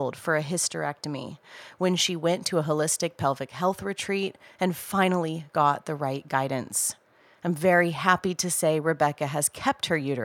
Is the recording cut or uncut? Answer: uncut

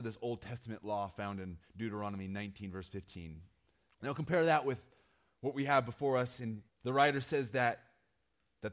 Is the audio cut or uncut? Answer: cut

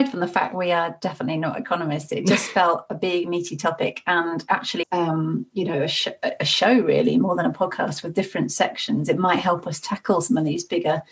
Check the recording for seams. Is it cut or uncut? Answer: cut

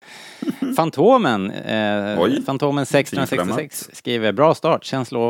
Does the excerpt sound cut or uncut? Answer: uncut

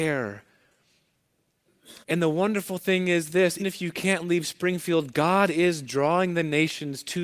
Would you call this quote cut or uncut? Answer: cut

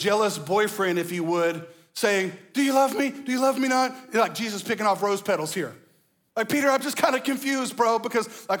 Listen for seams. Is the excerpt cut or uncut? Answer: uncut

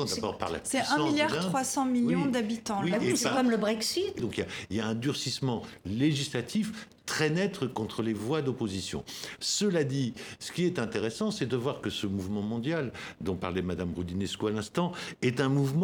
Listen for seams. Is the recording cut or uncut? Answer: cut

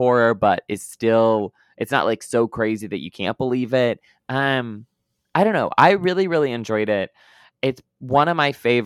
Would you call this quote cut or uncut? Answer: uncut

